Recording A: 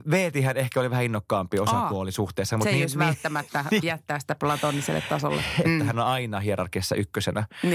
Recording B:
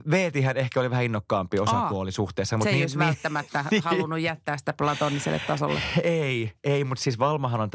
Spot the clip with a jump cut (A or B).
A